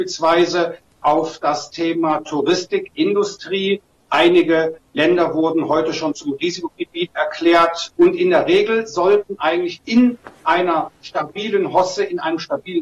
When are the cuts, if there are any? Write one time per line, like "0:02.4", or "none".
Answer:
0:07.9